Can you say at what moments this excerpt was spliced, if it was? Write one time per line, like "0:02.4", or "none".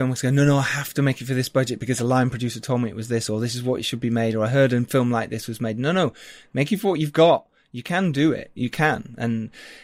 none